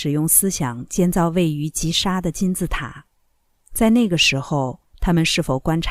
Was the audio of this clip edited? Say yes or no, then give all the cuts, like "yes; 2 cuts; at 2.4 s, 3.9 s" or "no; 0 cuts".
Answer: yes; 1 cut; at 4.9 s